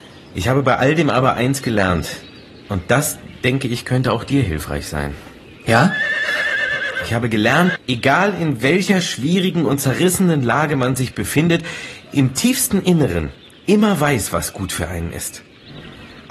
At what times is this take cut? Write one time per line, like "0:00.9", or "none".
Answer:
0:07.8